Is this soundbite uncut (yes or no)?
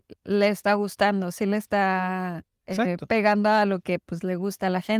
yes